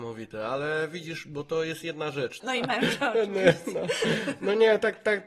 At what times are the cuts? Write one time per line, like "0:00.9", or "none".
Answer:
0:02.4